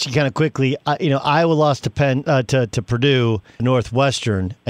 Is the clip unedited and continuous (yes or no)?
no